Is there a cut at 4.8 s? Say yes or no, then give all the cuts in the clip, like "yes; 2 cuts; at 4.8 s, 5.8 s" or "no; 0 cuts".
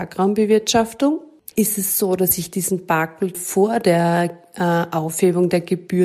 no; 2 cuts; at 1.5 s, 3.3 s